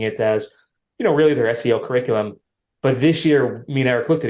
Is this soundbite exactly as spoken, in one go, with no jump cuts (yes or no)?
yes